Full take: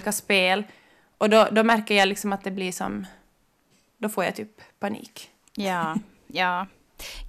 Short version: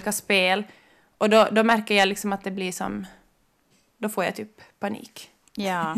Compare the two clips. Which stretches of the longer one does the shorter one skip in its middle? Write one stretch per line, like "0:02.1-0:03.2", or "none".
none